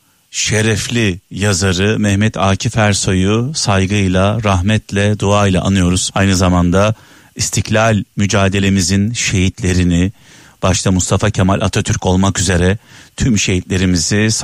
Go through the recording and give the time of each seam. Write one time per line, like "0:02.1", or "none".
0:06.1

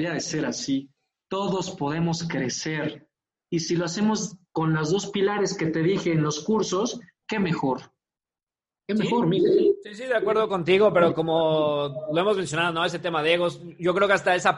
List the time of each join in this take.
none

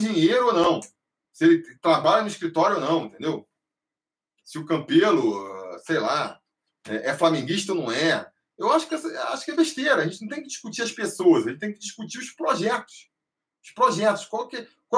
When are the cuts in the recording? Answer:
none

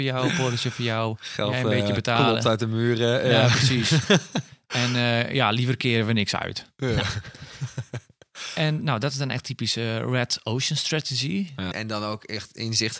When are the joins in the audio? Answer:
0:11.7

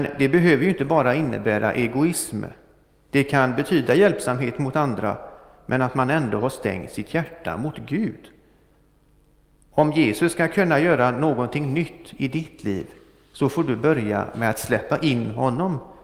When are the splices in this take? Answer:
none

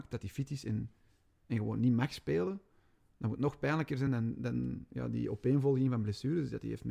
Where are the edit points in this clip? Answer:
none

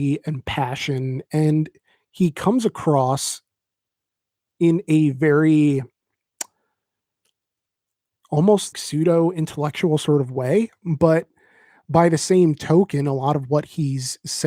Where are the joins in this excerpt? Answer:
0:08.7

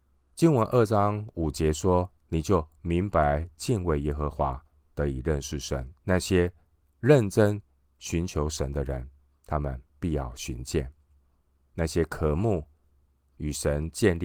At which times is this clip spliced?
0:06.0

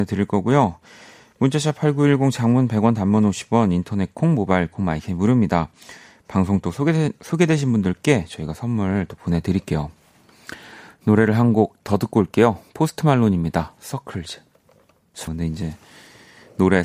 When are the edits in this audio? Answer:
0:15.3

